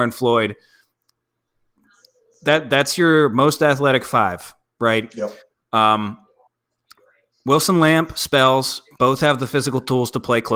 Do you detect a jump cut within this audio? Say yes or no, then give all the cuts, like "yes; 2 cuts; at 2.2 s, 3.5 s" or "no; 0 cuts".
no; 0 cuts